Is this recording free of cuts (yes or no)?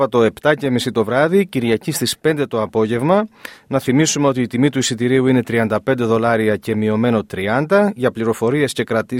yes